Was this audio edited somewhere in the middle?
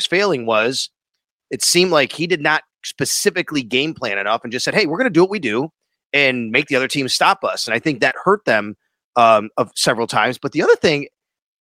no; 0 cuts

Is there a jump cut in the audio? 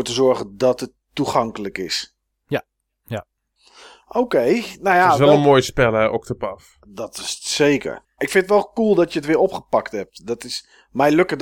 yes; 1 cut; at 8.2 s

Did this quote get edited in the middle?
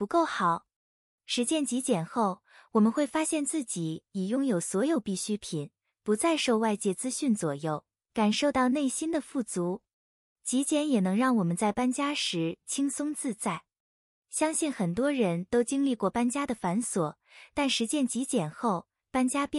no; 0 cuts

